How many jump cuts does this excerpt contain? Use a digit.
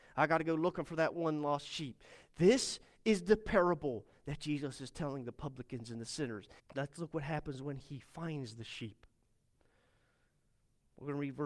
1